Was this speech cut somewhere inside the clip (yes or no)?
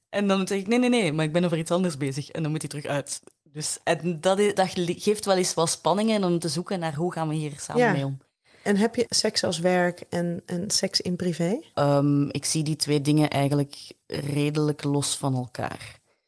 yes